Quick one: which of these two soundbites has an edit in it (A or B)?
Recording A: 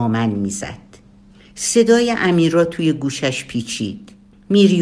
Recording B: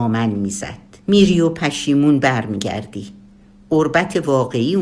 B